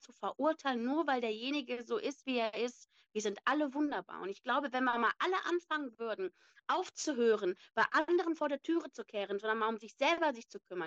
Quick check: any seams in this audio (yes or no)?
no